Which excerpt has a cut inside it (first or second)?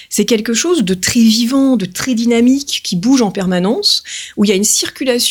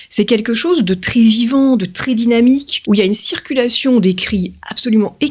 second